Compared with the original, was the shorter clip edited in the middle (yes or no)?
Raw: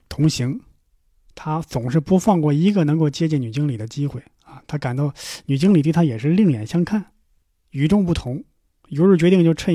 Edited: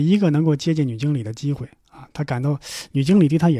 no